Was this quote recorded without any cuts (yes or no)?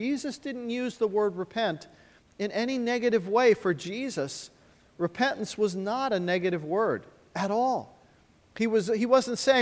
yes